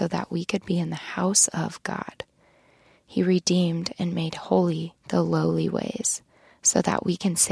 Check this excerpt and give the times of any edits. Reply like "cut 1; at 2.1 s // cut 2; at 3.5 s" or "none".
cut 1; at 3.0 s // cut 2; at 5.0 s